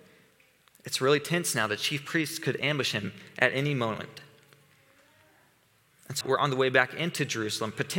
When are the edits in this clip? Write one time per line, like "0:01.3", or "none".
0:06.2